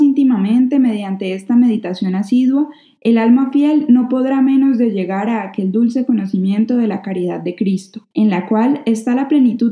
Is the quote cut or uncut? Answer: cut